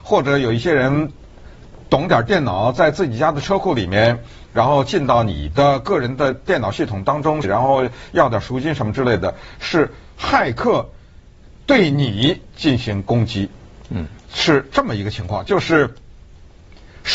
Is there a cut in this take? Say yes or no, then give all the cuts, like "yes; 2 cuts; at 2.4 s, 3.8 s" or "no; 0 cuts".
yes; 2 cuts; at 7.4 s, 13.8 s